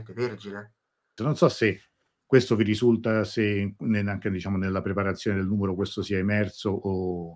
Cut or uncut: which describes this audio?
cut